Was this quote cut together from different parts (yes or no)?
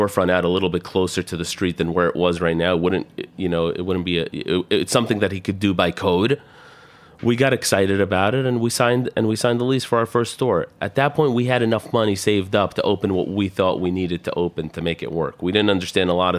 no